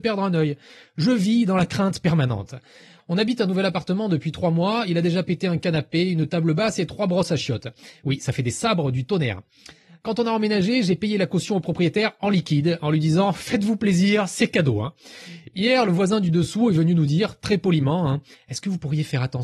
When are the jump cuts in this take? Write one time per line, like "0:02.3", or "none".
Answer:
none